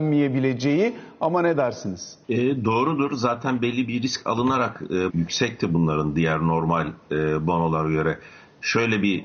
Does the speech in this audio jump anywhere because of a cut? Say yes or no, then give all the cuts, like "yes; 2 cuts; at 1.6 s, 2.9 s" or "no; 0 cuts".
yes; 2 cuts; at 2.2 s, 5.1 s